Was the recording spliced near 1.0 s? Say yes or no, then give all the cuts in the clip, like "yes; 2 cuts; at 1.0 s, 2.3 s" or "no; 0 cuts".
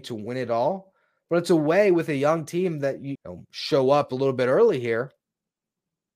no; 1 cut; at 3.2 s